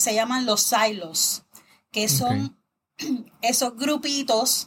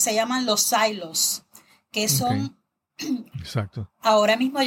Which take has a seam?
second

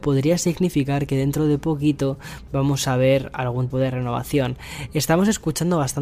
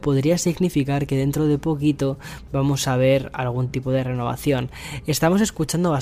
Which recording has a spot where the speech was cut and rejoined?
first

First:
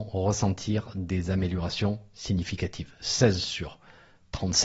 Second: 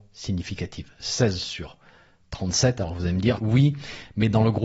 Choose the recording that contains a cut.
second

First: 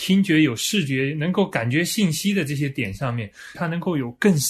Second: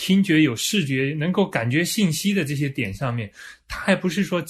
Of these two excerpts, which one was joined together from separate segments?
first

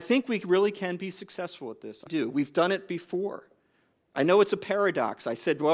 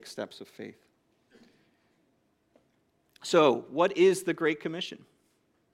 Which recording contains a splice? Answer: first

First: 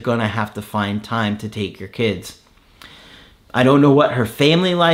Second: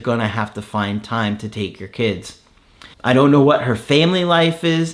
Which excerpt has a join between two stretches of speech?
second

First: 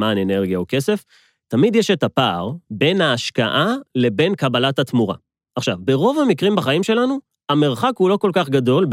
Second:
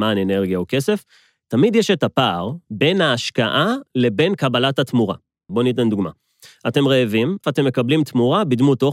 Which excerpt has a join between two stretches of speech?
second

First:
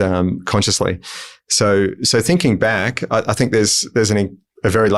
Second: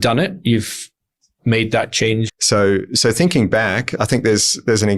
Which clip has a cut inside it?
second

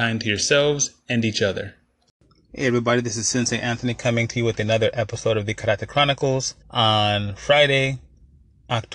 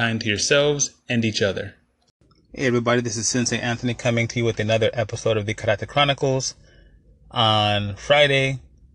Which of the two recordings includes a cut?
first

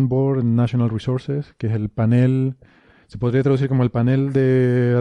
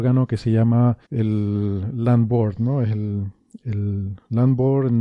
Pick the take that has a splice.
second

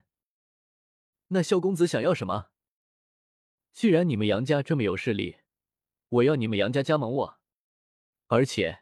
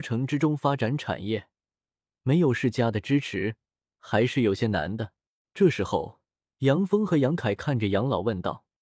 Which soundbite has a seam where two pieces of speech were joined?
second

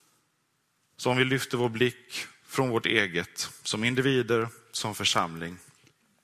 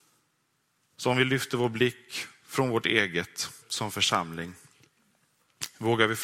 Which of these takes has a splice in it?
second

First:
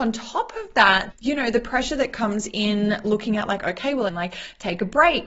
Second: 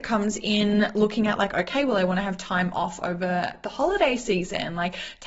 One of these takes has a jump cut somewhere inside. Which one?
first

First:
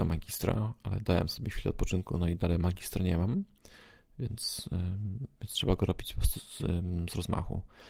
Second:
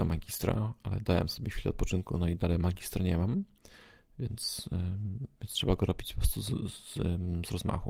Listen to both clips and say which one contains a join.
first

